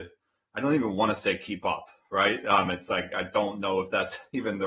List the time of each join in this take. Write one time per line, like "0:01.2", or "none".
none